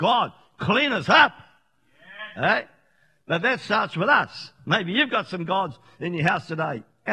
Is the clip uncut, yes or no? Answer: yes